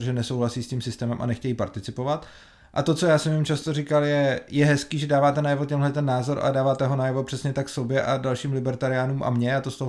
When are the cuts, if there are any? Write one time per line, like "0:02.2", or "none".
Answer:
none